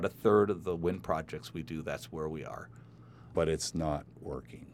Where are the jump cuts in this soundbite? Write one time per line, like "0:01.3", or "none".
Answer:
0:03.3